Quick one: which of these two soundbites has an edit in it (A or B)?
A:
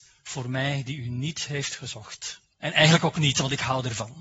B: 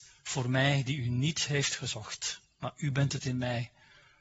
A